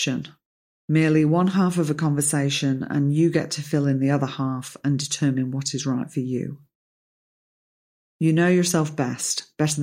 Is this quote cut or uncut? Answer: uncut